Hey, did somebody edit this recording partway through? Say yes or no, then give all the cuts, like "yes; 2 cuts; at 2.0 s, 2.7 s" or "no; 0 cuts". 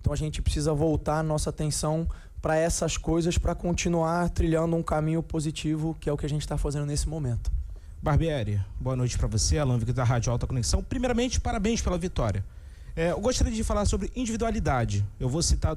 no; 0 cuts